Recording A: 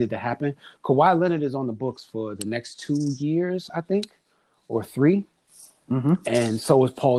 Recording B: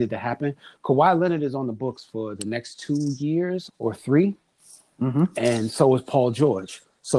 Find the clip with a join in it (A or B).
B